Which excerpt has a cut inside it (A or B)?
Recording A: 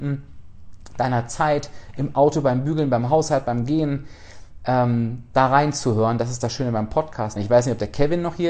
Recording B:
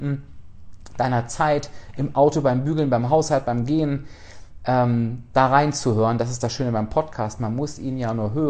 A